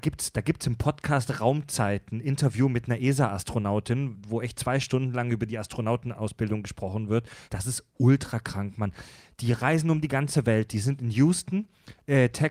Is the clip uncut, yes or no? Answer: no